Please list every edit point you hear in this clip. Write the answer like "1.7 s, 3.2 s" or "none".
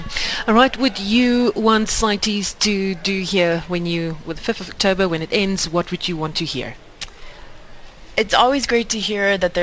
none